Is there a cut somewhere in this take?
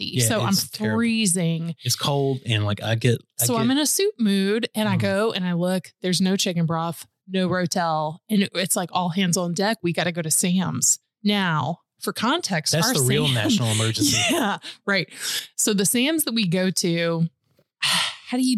no; 0 cuts

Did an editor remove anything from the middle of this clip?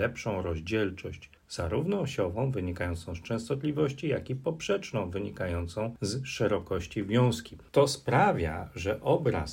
yes; 1 cut; at 1.4 s

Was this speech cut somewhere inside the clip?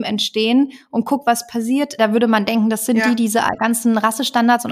yes; 1 cut; at 2.0 s

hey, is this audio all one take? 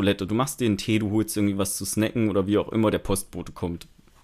yes; 0 cuts

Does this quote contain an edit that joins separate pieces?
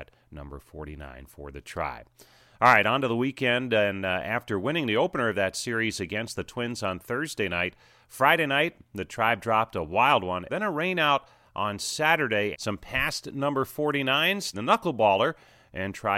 yes; 3 cuts; at 10.5 s, 12.5 s, 14.5 s

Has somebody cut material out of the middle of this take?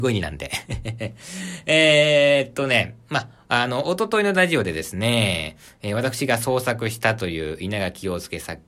no; 0 cuts

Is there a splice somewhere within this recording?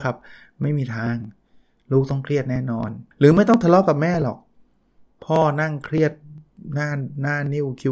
yes; 1 cut; at 3.1 s

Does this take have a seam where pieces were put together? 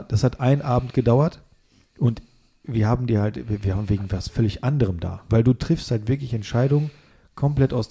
yes; 1 cut; at 5.3 s

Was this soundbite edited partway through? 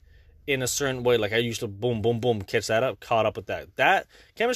no; 0 cuts

